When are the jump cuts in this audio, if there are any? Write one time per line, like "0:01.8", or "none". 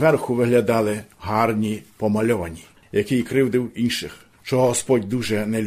0:02.8
0:04.3